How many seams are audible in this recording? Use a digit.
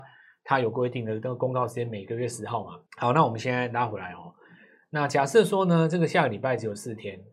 1